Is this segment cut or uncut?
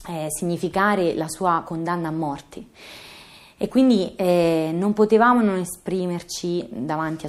uncut